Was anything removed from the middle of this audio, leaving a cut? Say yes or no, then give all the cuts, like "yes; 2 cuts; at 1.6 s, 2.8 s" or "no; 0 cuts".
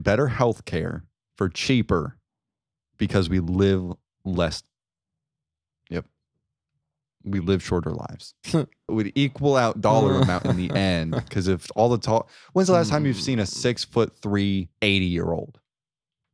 yes; 2 cuts; at 8.9 s, 14.7 s